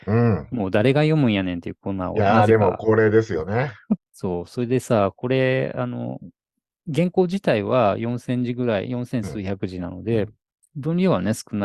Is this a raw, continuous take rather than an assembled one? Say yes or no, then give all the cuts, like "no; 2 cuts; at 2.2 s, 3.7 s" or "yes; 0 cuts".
no; 1 cut; at 4.0 s